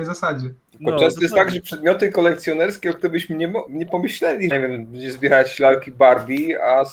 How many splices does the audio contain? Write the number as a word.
one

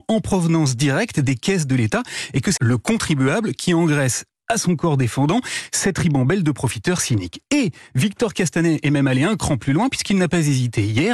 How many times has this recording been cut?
one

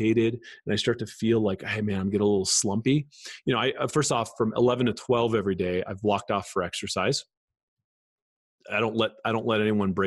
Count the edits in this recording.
zero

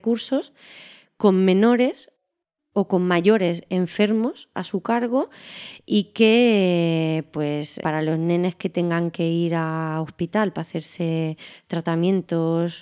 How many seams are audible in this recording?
one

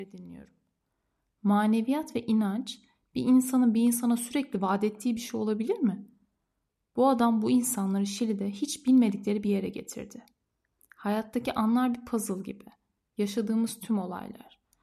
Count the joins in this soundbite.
one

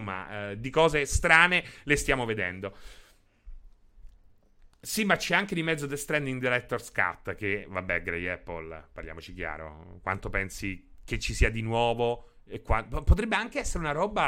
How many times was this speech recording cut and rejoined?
one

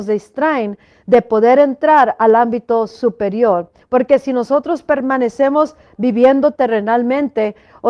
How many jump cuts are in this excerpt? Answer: one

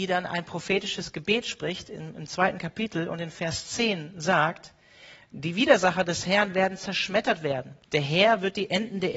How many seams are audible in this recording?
one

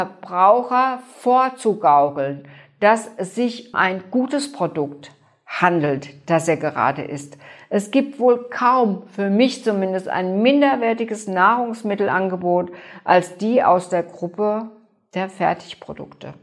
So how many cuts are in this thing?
one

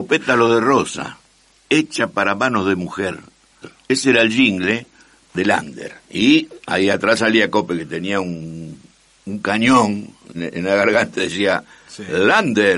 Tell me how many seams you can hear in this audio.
three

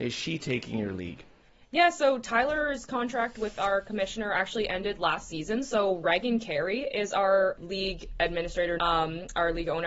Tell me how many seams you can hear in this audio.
one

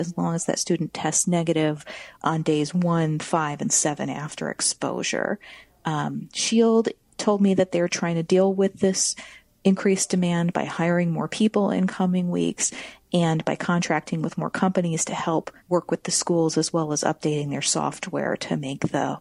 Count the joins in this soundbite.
one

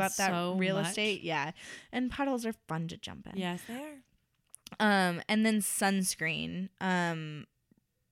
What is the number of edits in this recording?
zero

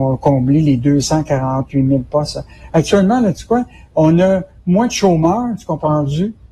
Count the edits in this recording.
zero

